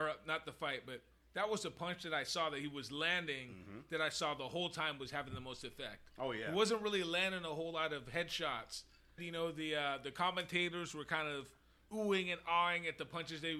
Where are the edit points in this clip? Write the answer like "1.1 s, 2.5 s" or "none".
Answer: 9.2 s